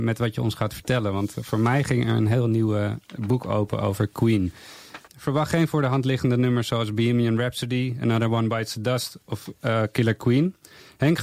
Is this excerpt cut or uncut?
cut